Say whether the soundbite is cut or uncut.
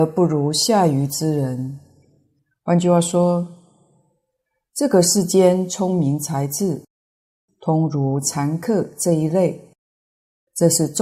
uncut